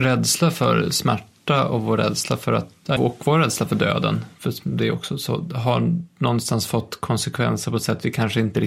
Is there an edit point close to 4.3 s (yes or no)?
no